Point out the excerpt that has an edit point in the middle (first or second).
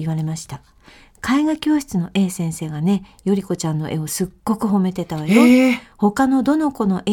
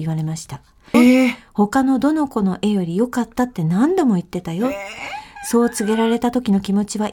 second